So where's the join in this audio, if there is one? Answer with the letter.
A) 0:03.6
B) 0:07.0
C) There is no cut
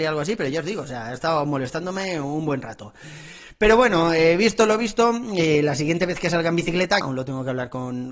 B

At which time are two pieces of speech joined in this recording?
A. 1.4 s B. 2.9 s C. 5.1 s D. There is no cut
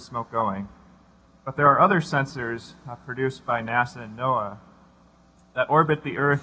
D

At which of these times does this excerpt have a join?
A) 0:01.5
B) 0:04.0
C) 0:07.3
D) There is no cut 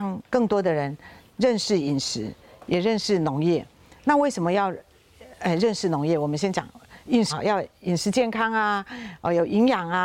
C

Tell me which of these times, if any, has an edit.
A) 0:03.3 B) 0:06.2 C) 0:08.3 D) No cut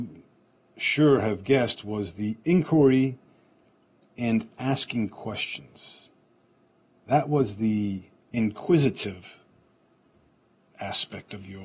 C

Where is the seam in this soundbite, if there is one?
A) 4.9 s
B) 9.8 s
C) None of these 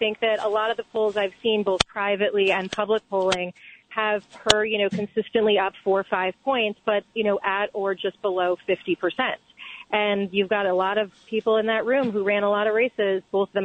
C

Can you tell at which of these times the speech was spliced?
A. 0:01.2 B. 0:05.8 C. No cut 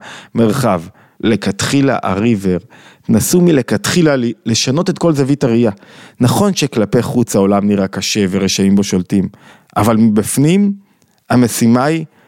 A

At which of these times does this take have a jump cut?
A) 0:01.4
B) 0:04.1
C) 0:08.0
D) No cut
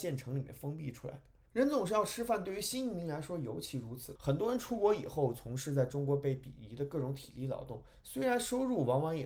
B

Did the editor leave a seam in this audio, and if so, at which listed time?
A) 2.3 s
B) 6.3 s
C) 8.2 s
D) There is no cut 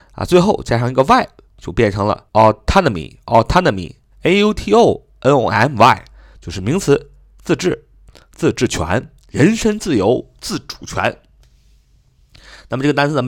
A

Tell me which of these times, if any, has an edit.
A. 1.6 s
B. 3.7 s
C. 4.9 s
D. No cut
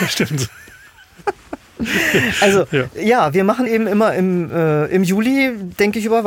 D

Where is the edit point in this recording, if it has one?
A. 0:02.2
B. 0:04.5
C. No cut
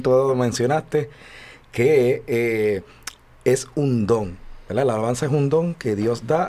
C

